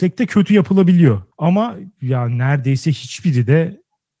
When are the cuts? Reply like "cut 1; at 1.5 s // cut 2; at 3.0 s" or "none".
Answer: cut 1; at 1.3 s